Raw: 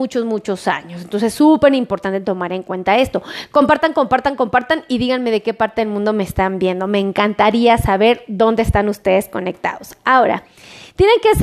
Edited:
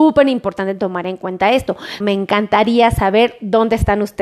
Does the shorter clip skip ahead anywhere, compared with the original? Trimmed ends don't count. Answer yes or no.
yes